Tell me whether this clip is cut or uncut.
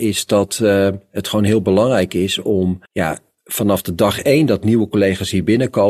cut